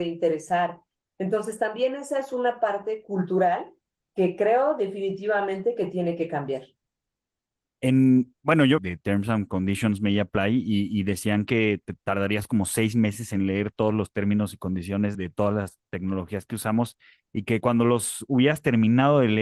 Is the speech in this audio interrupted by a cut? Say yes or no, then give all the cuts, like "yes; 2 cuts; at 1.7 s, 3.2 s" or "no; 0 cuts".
yes; 2 cuts; at 8.8 s, 15.1 s